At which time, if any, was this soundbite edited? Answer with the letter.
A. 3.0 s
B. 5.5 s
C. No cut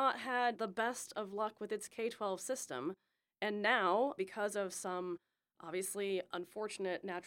C